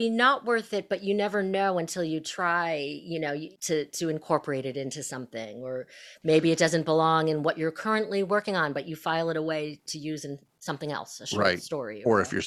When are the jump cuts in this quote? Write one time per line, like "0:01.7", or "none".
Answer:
0:03.6